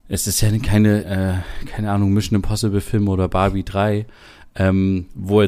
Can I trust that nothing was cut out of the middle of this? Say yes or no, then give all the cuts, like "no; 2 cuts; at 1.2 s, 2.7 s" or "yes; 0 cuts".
no; 1 cut; at 1.0 s